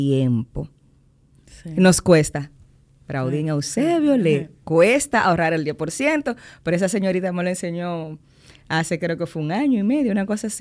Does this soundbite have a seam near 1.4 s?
yes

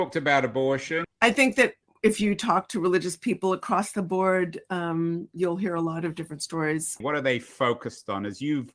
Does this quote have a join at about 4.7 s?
no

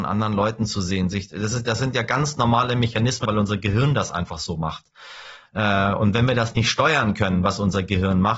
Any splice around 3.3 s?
yes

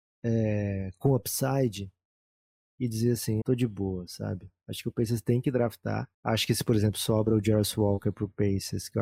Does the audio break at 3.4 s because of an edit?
yes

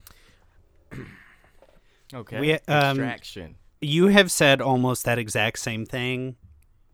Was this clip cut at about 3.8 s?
yes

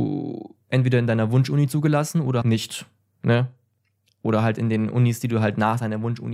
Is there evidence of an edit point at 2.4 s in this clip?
yes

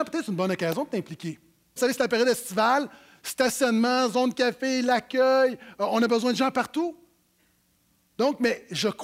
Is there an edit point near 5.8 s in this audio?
no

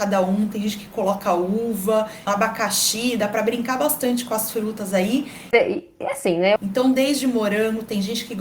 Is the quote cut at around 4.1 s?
no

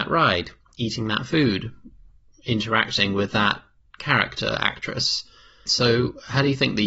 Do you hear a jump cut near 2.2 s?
no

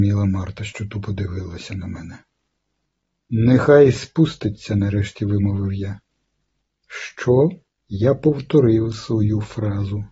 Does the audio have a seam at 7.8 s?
yes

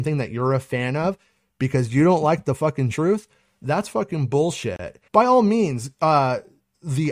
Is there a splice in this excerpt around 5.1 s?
yes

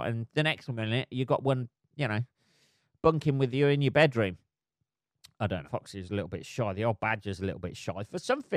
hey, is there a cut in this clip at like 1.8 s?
no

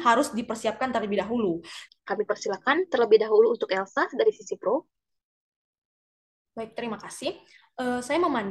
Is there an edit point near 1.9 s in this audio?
yes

